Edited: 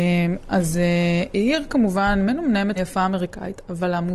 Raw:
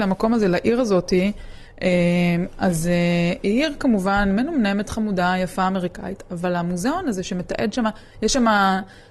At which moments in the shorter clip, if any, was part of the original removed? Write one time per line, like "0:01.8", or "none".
0:02.8